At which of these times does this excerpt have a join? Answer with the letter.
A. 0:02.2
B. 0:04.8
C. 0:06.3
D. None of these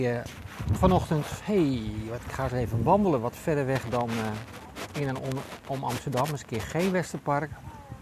D